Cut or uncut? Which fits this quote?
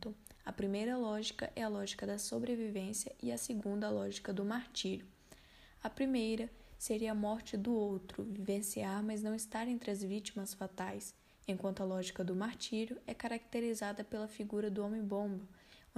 uncut